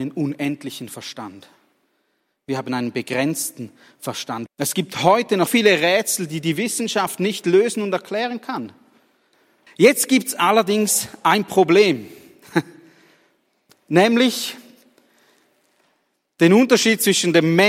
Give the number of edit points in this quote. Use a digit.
3